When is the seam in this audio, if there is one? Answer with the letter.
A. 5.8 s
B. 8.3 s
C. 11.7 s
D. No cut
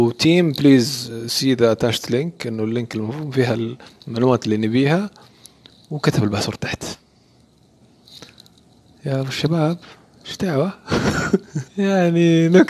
C